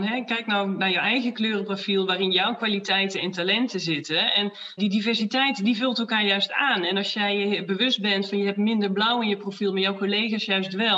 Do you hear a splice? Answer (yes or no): yes